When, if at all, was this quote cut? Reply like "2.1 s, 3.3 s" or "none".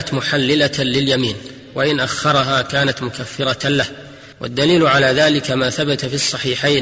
4.3 s